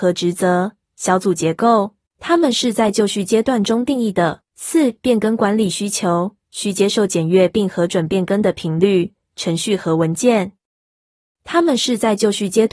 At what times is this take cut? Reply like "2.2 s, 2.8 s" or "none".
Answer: 2.1 s, 4.5 s